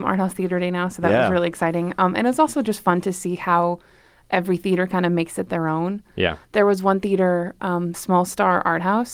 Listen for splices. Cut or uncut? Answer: cut